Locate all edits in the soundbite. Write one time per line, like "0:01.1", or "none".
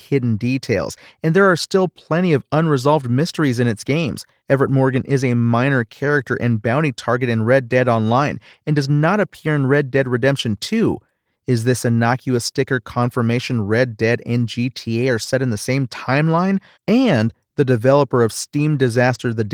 0:04.4
0:11.3
0:16.7